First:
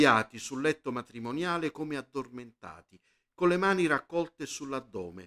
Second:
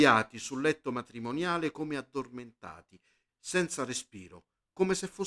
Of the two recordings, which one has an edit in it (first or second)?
second